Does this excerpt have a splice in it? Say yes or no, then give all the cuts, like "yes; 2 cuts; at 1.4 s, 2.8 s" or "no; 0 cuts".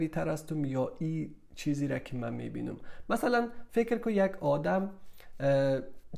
no; 0 cuts